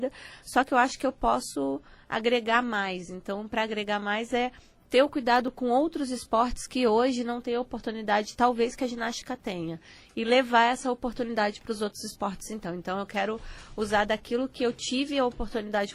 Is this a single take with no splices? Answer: yes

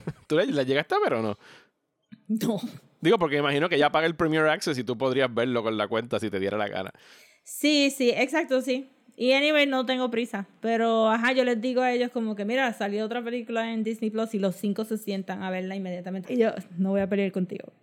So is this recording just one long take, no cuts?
no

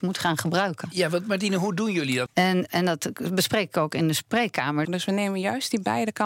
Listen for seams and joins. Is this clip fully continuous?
no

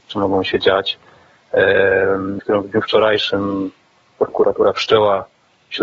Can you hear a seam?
yes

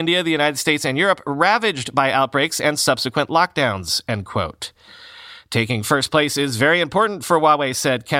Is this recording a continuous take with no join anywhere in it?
yes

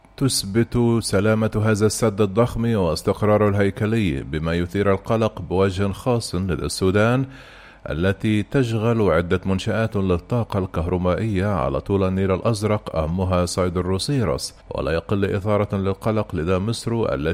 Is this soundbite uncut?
no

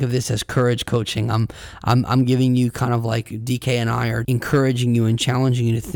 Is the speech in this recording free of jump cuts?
no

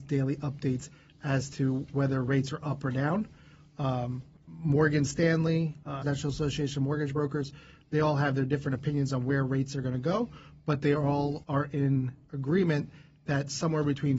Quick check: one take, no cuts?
no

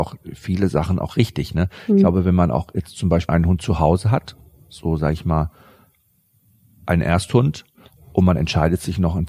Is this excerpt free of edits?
no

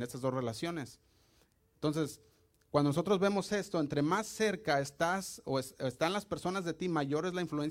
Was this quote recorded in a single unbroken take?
no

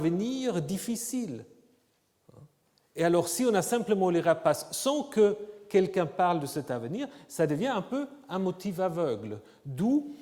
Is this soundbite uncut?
yes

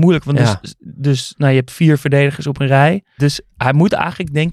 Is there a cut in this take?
yes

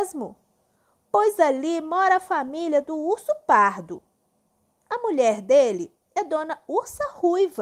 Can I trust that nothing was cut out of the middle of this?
yes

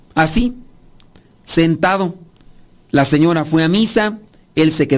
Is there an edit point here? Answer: no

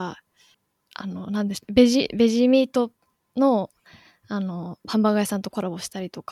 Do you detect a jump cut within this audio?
no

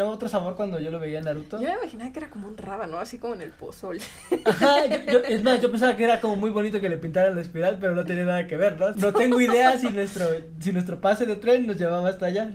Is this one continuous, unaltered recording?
no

